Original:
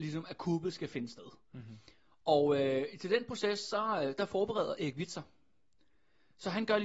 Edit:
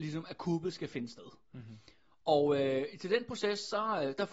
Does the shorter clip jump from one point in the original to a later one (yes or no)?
no